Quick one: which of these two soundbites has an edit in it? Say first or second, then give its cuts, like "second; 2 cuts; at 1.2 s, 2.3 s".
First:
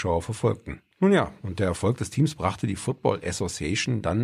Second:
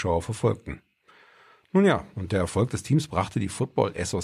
first; 1 cut; at 0.9 s